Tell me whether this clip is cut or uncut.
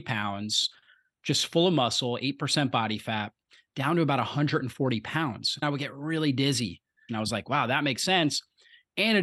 cut